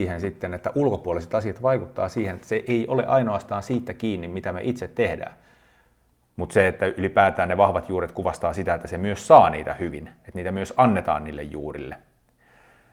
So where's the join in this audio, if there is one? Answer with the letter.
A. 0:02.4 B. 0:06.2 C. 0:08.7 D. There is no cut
B